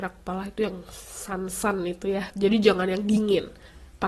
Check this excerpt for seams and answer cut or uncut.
cut